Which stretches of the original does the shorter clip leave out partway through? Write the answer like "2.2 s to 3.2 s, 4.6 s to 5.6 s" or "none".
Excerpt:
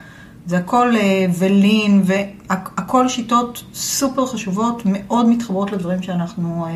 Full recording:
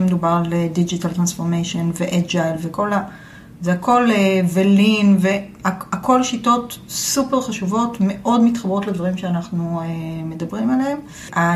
none